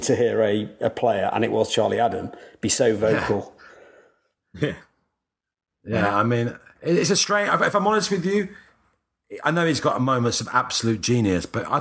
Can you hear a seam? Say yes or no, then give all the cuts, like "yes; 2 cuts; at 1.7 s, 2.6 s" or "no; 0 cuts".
no; 0 cuts